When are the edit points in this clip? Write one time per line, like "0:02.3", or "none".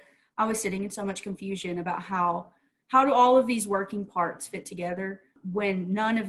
none